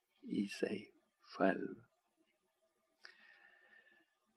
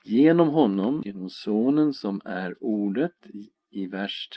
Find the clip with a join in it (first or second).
second